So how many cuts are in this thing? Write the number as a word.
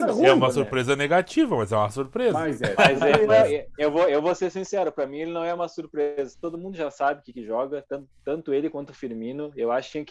two